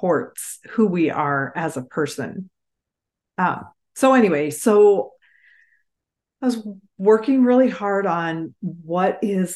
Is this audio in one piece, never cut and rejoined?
yes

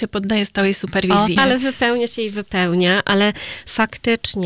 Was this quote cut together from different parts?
yes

